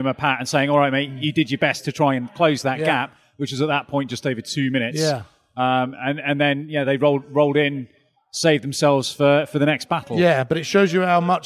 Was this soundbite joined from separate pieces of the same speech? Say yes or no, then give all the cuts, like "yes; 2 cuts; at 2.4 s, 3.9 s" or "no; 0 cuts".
no; 0 cuts